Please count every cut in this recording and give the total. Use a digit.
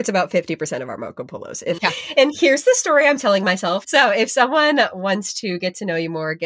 2